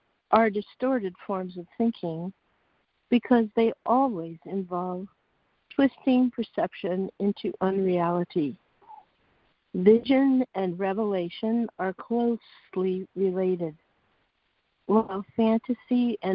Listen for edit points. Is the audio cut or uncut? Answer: cut